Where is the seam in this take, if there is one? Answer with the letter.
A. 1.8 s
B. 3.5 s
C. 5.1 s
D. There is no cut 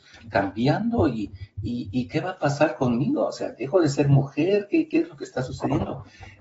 D